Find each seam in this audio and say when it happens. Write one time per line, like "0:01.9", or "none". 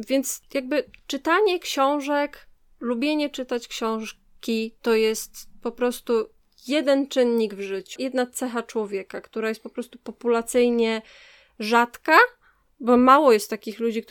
0:08.0